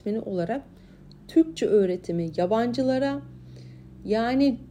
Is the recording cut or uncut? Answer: uncut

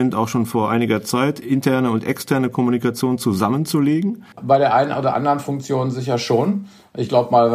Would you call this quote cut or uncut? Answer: cut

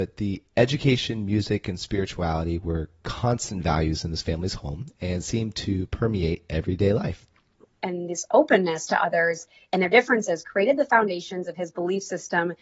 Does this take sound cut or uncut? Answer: cut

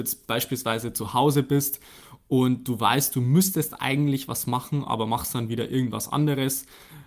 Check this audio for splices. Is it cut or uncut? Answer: uncut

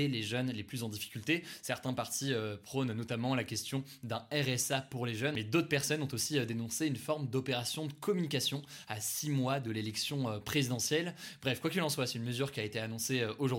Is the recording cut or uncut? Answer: uncut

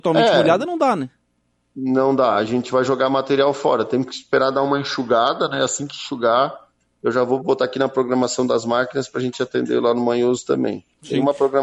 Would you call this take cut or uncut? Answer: uncut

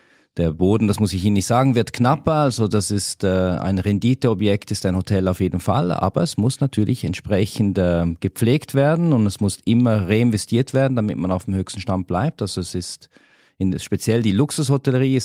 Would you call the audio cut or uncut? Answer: uncut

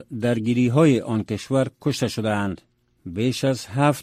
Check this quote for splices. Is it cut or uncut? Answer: uncut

